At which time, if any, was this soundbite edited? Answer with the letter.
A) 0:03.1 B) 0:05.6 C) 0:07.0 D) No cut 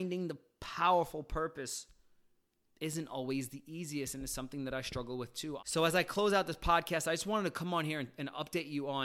B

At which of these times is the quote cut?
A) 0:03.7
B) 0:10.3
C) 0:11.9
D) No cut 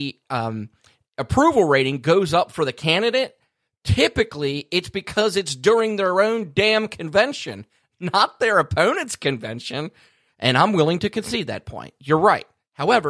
B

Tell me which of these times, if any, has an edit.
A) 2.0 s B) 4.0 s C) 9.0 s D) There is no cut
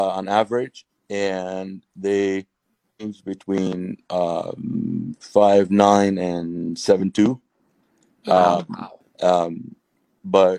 C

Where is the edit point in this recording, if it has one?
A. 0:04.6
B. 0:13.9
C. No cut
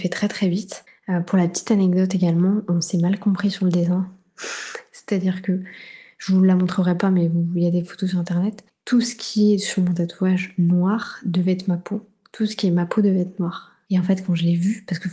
B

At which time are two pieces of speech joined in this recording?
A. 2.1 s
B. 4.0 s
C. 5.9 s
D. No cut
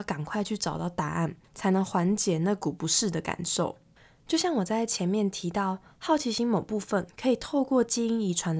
D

